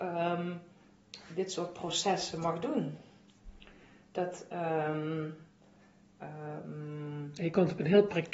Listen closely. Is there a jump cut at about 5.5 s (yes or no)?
no